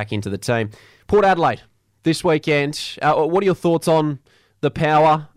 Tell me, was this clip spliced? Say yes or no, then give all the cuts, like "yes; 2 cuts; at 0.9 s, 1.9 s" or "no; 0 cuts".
yes; 1 cut; at 1.0 s